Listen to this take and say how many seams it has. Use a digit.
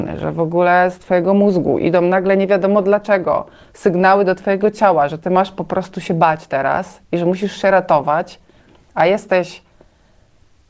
0